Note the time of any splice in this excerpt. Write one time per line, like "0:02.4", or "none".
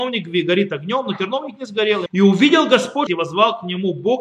0:02.1
0:03.1